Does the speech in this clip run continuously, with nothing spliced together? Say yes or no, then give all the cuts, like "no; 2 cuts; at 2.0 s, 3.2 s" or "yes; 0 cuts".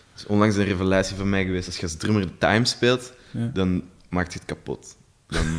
yes; 0 cuts